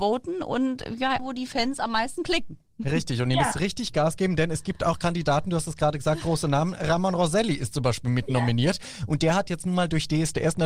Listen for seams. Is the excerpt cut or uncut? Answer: cut